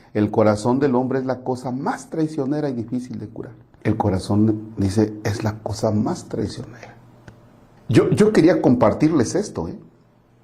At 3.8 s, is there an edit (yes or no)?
yes